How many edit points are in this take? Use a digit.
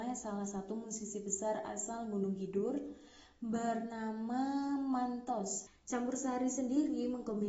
1